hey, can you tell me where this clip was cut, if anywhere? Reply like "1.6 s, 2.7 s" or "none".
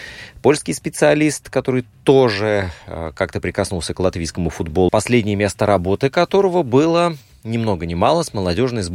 4.9 s